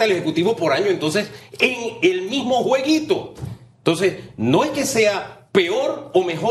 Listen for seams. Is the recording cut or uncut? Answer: uncut